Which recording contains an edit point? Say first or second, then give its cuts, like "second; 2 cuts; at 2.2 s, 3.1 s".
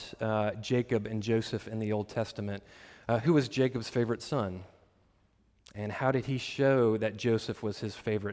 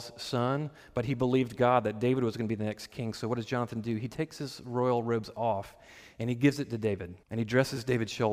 second; 1 cut; at 7.2 s